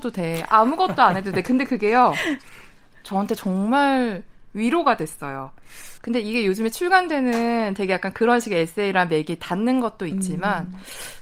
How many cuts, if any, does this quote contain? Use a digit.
1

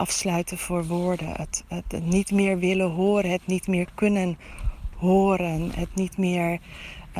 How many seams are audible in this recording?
0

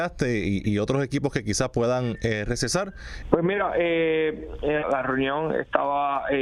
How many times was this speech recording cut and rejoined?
2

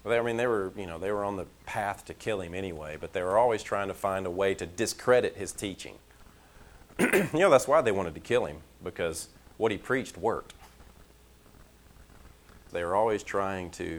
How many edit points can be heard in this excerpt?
1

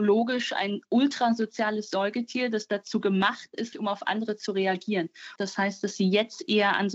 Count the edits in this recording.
2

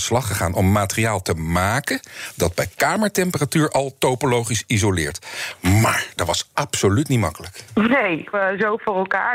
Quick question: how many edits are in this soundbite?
1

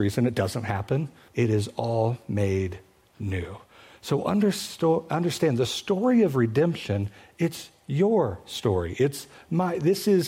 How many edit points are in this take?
1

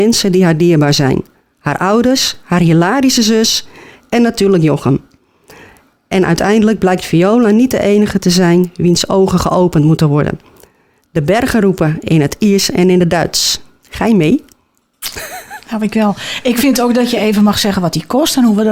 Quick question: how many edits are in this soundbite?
0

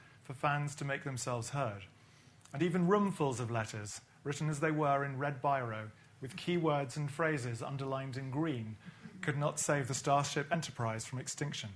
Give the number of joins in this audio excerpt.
0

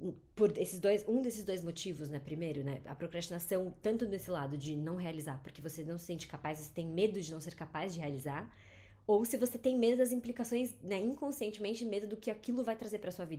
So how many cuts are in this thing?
0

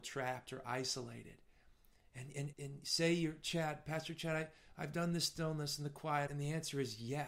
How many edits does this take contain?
2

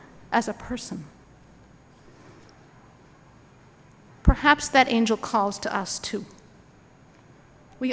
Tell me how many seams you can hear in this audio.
0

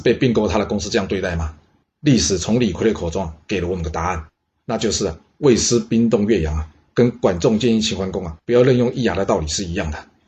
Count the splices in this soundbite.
1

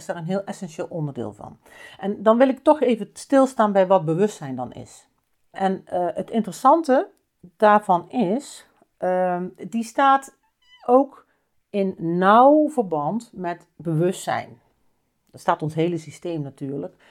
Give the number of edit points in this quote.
1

